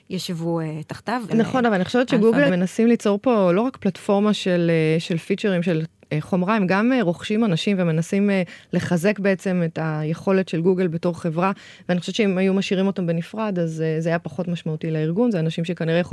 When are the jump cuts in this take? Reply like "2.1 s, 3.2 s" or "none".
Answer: 1.3 s, 2.5 s